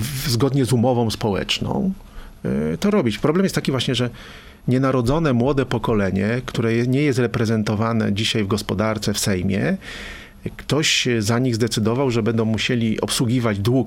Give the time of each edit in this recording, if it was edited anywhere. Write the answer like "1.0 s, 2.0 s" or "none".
none